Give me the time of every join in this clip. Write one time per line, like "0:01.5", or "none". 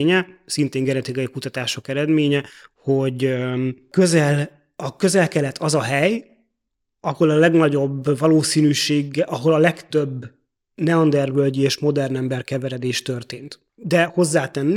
none